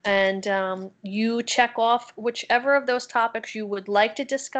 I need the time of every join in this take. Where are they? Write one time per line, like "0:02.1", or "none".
none